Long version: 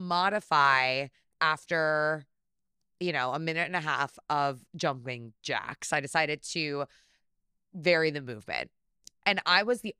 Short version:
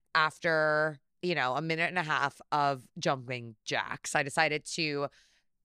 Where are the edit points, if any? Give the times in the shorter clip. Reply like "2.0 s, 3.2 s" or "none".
1.1 s